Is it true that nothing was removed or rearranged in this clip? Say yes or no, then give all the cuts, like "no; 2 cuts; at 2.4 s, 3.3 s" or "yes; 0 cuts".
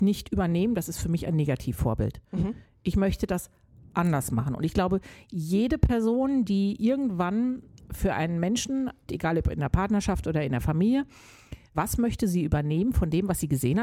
no; 2 cuts; at 9.1 s, 11.7 s